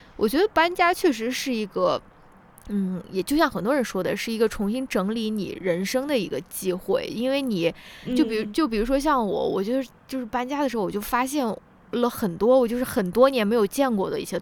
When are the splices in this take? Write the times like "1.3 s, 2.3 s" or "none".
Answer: 10.0 s